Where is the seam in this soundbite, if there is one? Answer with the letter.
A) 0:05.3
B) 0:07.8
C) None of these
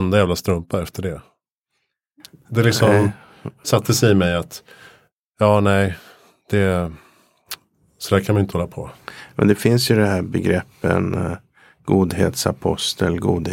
C